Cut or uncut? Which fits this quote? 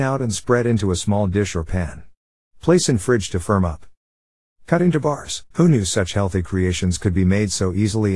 cut